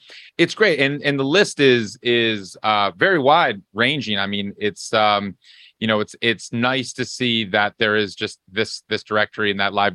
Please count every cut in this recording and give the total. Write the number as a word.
zero